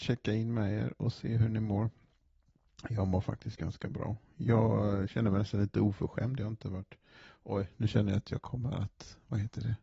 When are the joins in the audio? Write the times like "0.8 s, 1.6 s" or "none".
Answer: none